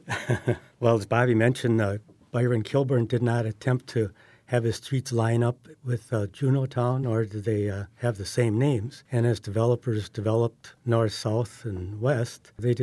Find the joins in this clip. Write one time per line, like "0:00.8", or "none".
none